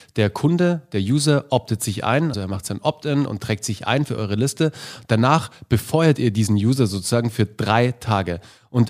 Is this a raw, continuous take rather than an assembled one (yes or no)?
no